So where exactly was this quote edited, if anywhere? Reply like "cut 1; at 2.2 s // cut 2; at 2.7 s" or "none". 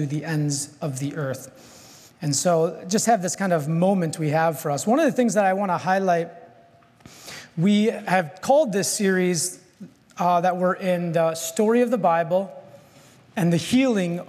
none